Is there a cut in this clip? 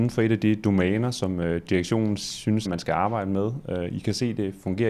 yes; 1 cut; at 2.6 s

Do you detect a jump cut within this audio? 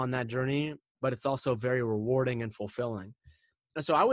yes; 1 cut; at 0.9 s

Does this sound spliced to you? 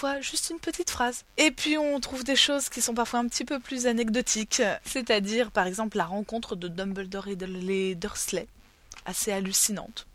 yes; 2 cuts; at 1.3 s, 4.8 s

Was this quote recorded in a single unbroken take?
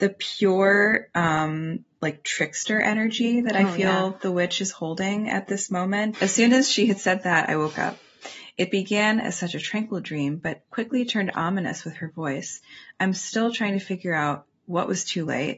no; 1 cut; at 6.1 s

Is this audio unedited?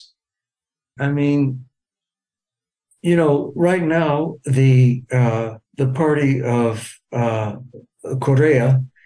no; 2 cuts; at 1.0 s, 5.7 s

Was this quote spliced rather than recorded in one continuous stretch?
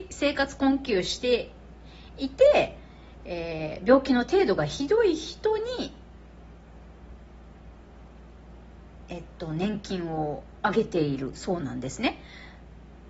no; 0 cuts

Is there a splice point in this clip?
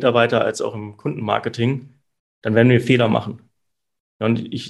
no; 0 cuts

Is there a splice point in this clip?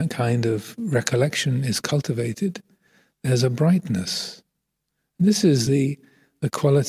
no; 0 cuts

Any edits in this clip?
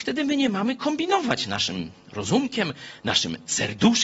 no; 0 cuts

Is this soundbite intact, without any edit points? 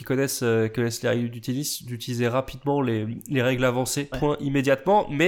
no; 1 cut; at 4.1 s

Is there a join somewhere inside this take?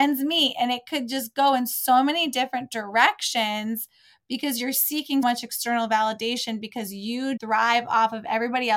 yes; 2 cuts; at 5.2 s, 7.4 s

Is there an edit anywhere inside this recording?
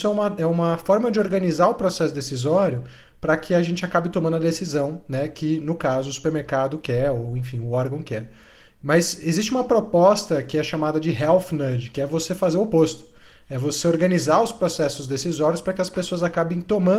no; 0 cuts

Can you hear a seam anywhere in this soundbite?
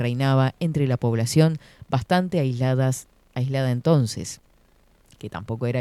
no; 0 cuts

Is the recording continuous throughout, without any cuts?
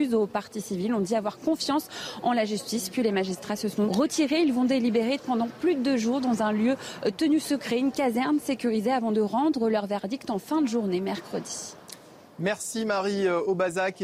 no; 1 cut; at 3.9 s

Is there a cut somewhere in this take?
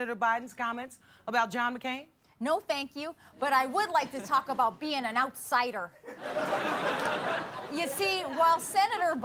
no; 0 cuts

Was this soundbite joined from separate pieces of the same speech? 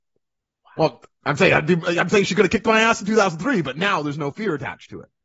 no; 0 cuts

